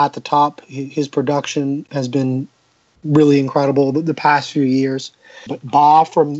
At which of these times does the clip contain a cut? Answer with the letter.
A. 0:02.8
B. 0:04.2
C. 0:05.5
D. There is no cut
C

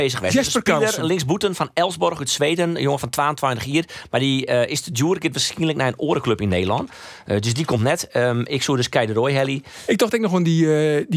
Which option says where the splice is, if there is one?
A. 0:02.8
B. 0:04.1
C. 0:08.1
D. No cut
D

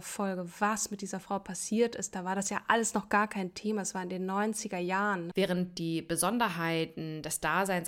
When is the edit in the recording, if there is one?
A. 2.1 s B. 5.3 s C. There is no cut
B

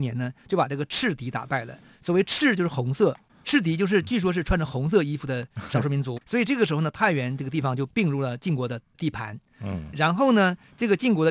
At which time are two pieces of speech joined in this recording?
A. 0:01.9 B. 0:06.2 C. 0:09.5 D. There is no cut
B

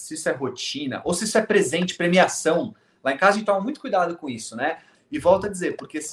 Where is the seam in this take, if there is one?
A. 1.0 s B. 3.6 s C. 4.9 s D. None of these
C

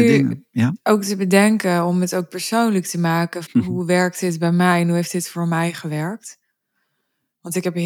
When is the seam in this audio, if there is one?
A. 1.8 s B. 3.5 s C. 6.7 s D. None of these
B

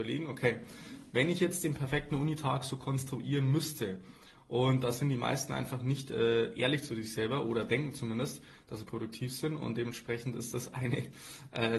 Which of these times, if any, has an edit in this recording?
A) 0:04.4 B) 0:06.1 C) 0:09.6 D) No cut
A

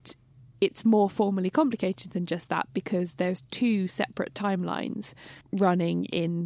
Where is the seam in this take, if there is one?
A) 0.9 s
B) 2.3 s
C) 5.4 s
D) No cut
C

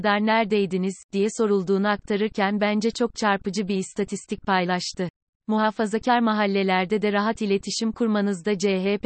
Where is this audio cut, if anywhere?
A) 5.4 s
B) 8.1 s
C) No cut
A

